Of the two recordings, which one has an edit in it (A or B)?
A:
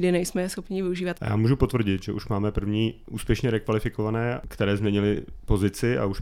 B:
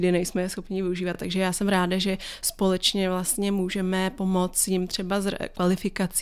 A